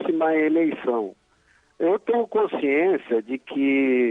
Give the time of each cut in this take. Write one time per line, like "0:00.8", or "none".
none